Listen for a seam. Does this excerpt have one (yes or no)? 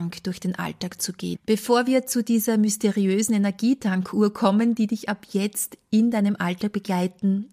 yes